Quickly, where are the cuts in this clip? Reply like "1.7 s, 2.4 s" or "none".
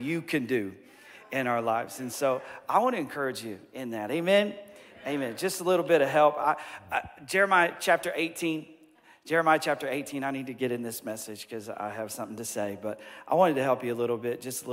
none